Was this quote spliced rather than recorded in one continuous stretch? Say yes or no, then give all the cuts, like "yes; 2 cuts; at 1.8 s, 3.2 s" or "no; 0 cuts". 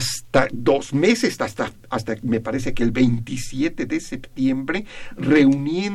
no; 0 cuts